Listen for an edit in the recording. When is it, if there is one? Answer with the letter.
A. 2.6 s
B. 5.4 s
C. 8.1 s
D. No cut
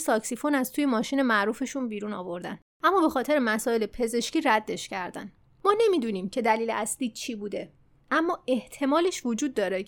A